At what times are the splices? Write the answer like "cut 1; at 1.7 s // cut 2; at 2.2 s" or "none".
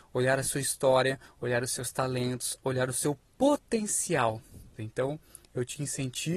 cut 1; at 4.8 s